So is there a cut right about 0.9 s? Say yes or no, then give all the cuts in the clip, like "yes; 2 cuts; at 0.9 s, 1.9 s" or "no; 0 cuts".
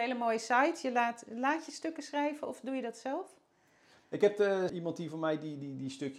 no; 1 cut; at 4.7 s